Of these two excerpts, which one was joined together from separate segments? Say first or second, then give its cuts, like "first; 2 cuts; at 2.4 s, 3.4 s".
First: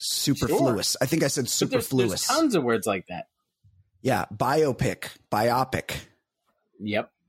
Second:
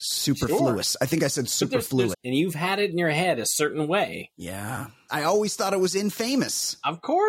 second; 2 cuts; at 2.1 s, 5.1 s